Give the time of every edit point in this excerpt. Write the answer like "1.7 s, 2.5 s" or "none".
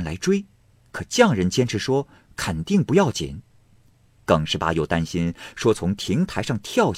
none